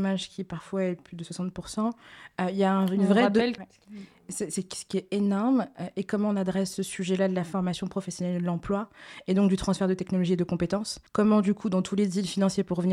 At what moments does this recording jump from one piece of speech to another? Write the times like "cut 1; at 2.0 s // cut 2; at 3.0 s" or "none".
cut 1; at 3.6 s // cut 2; at 11.1 s